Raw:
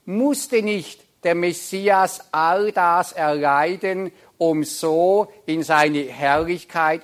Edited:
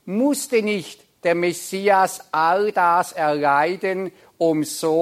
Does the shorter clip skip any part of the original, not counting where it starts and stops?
no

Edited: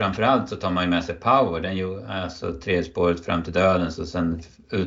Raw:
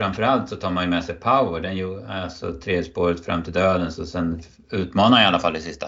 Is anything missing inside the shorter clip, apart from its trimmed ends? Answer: no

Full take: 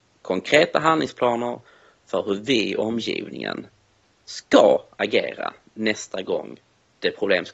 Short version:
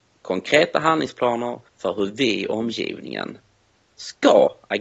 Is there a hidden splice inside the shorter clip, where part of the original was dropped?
yes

